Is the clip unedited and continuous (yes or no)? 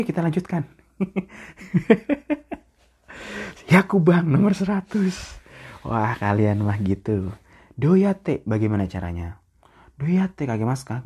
yes